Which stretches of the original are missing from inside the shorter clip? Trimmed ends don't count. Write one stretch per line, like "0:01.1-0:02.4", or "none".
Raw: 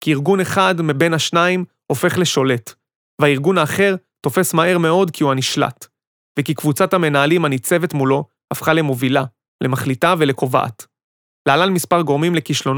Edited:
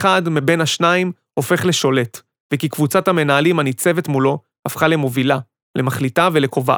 0:02.9-0:06.2